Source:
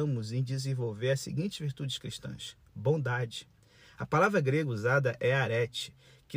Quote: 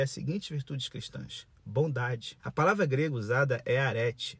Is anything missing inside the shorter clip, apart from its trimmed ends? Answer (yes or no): yes